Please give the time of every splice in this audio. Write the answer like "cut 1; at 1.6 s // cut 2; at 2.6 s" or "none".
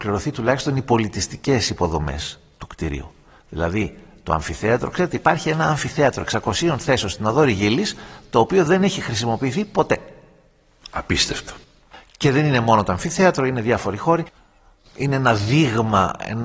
none

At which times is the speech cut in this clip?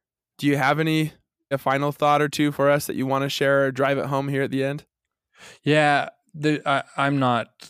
cut 1; at 1.5 s

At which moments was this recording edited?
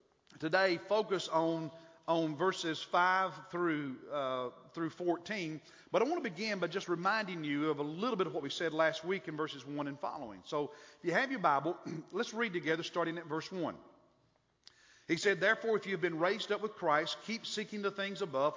none

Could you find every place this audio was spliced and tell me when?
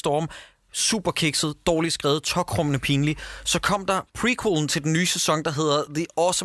none

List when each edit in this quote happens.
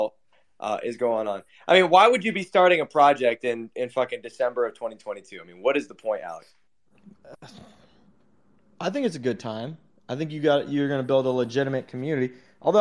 none

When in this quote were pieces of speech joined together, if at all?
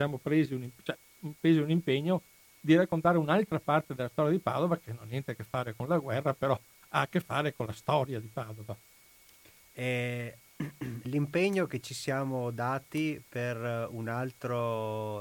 cut 1; at 9.7 s // cut 2; at 11.0 s

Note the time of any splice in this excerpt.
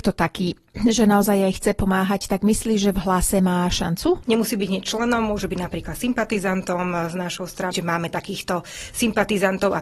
cut 1; at 4.2 s // cut 2; at 7.7 s

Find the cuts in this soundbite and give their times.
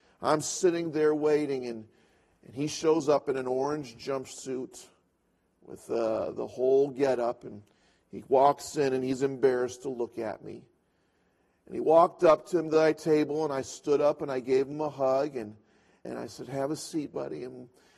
cut 1; at 16.0 s

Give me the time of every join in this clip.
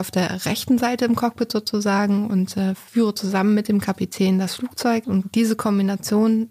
cut 1; at 5.0 s

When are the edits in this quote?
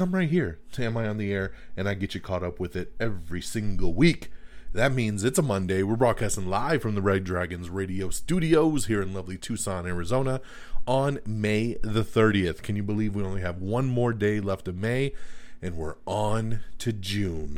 none

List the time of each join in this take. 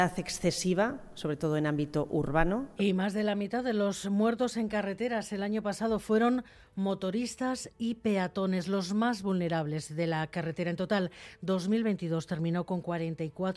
cut 1; at 2.8 s

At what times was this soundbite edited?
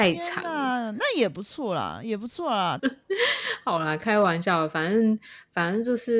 cut 1; at 2.8 s

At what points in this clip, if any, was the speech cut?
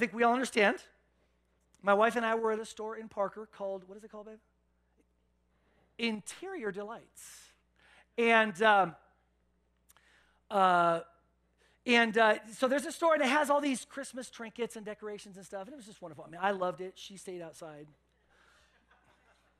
none

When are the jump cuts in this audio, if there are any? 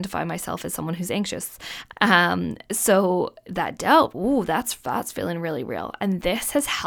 cut 1; at 1.9 s

